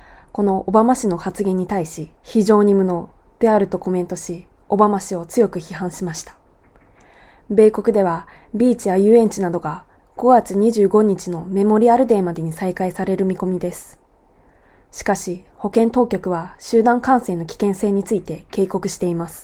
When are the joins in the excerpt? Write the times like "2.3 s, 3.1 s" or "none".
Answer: 2.2 s